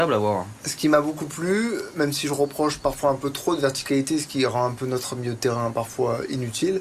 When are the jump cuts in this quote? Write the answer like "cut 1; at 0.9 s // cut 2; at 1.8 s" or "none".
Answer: none